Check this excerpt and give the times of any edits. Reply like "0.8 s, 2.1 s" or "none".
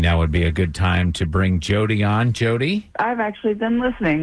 none